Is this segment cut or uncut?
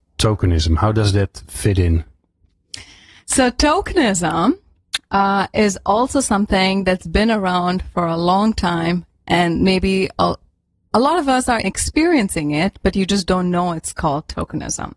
cut